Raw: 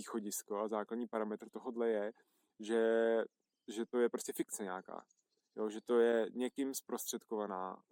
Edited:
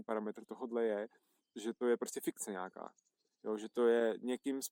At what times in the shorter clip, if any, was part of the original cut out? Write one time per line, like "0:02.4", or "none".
0:01.4